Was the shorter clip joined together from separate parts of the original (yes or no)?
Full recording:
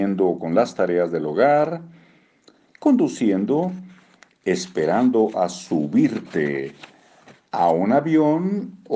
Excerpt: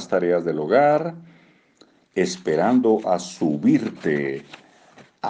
yes